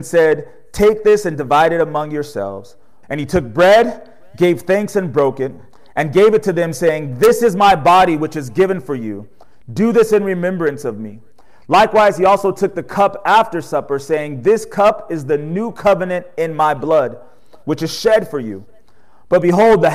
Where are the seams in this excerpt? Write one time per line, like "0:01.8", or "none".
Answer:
0:03.0